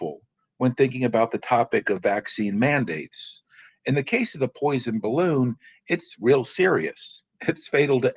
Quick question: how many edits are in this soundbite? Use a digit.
1